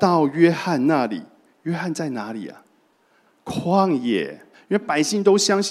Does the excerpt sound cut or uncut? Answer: cut